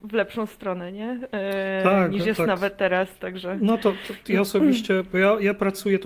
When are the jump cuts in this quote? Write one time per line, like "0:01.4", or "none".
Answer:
none

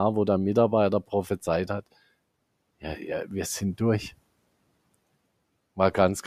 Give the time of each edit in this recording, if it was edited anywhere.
none

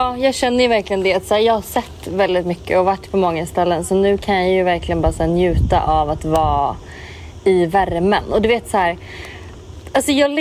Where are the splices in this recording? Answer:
none

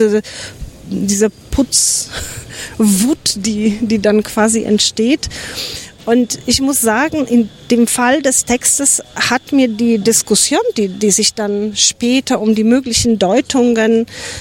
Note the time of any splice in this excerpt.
none

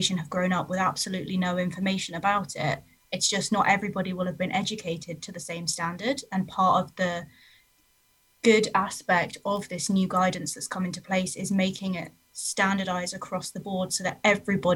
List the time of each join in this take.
0:03.0

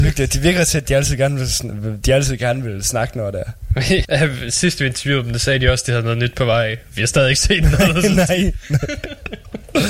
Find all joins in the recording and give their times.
0:04.0

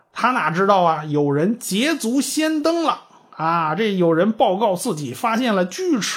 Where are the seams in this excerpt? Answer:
none

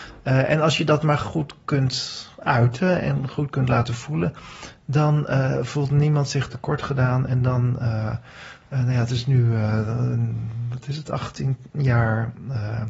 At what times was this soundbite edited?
none

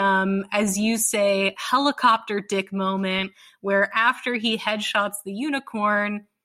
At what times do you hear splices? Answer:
none

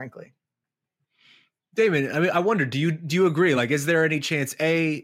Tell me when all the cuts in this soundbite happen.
none

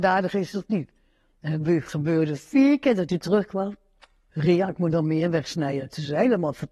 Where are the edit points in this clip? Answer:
none

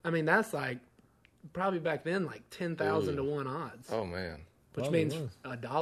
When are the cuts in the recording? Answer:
none

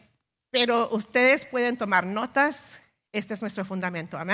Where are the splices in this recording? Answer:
0:03.1

